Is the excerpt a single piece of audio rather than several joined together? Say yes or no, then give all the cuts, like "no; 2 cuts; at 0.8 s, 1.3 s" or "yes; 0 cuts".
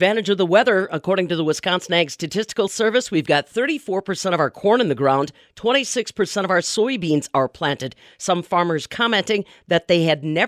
yes; 0 cuts